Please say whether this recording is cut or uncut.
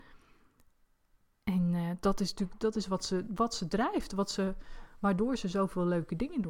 uncut